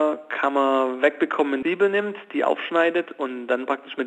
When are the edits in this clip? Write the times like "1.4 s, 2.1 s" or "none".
1.6 s